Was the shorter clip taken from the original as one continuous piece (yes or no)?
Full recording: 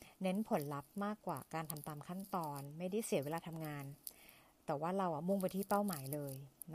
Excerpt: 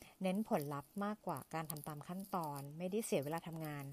yes